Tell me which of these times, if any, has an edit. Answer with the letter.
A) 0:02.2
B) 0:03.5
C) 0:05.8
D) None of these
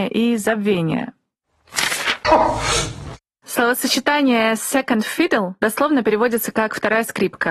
A